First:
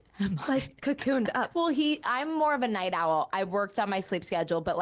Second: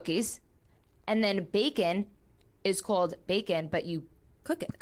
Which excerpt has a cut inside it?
first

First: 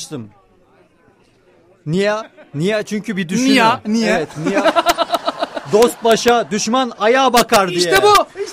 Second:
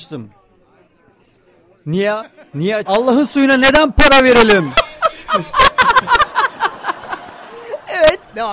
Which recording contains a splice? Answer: second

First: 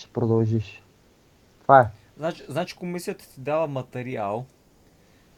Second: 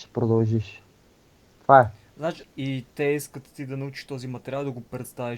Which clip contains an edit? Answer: second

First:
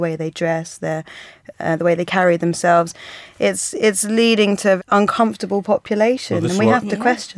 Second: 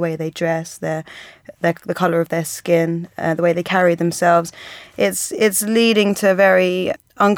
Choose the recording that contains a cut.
first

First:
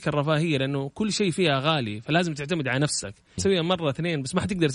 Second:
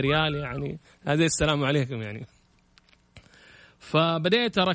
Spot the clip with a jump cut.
first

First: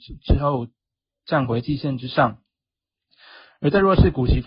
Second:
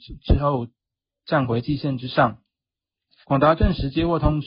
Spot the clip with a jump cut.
second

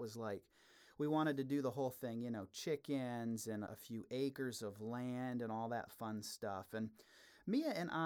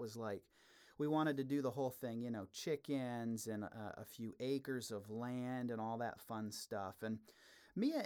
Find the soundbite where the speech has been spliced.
first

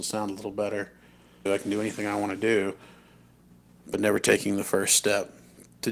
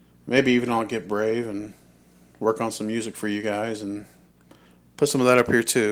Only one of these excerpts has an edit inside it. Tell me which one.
first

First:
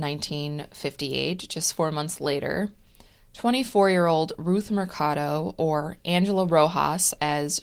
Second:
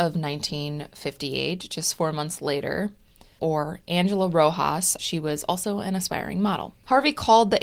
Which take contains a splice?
second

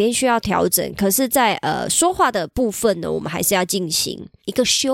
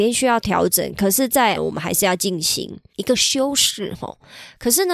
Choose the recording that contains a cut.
second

